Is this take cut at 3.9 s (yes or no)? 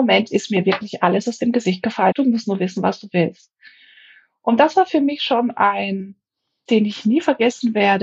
no